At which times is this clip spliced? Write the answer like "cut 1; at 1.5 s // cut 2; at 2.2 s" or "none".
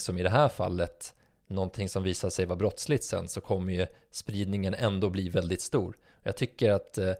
none